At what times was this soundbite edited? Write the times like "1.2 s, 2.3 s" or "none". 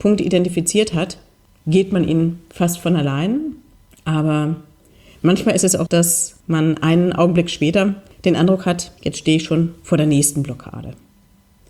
5.9 s, 9.0 s